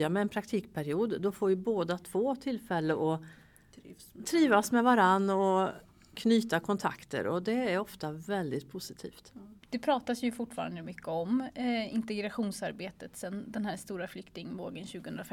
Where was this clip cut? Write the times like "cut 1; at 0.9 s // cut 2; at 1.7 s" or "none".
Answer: none